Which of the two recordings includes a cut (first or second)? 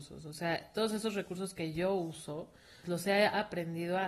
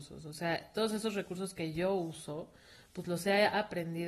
first